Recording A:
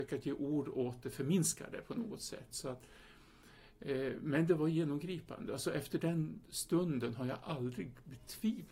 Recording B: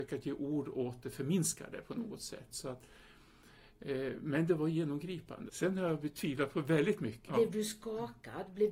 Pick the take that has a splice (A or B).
B